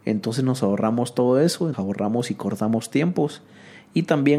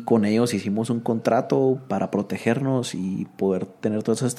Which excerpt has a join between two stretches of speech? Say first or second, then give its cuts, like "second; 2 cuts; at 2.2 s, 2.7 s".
first; 1 cut; at 1.7 s